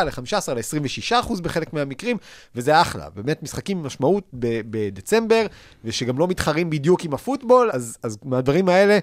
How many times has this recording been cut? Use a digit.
1